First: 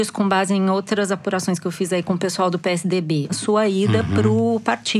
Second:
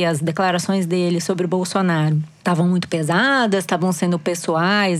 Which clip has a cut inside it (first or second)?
first